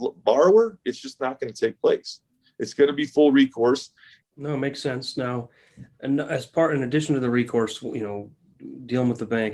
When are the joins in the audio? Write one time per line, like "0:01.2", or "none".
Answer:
0:04.2